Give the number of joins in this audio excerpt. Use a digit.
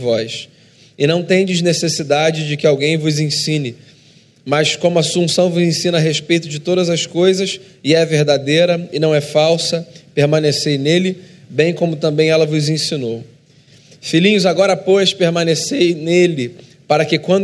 0